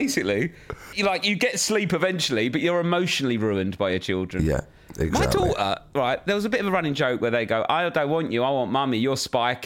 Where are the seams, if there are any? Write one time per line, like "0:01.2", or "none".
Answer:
0:00.9